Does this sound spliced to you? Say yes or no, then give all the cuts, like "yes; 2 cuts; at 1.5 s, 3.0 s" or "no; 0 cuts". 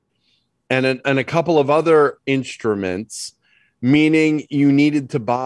no; 0 cuts